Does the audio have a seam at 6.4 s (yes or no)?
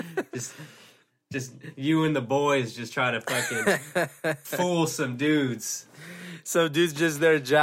no